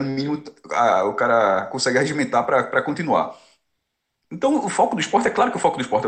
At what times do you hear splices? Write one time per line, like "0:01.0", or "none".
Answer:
none

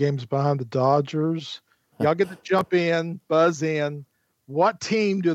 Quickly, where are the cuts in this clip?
0:01.9

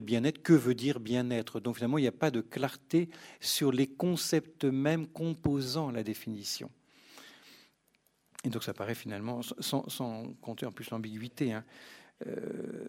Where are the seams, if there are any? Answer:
none

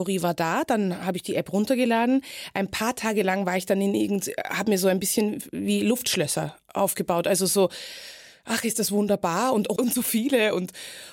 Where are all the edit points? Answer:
0:09.8

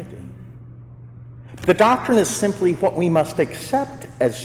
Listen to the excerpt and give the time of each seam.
0:01.6

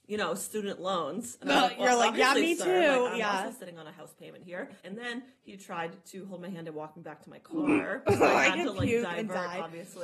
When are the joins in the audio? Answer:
0:04.8

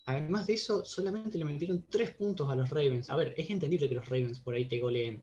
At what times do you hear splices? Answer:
0:03.1

